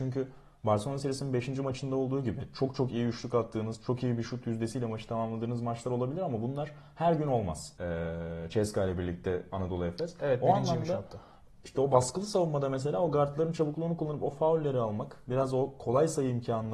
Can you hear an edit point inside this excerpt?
yes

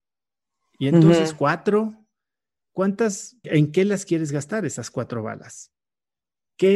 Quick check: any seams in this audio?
yes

